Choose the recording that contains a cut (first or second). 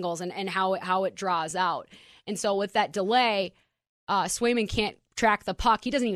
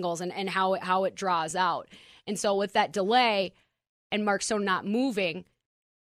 first